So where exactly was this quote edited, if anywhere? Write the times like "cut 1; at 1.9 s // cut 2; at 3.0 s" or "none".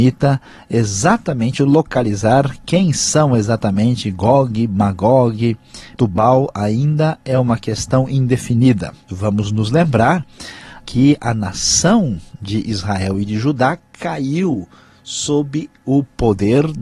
cut 1; at 5.9 s // cut 2; at 9.1 s // cut 3; at 10.8 s